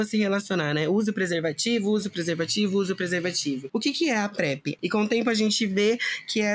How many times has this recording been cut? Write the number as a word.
two